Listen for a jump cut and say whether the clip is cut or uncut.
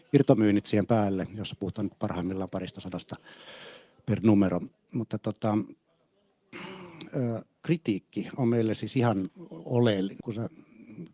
cut